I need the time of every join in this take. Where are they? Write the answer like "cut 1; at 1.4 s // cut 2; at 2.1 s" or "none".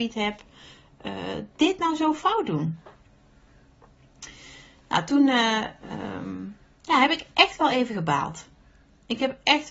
none